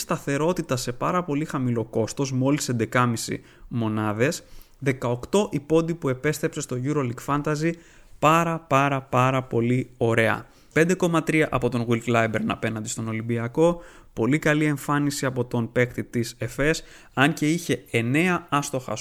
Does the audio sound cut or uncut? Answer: cut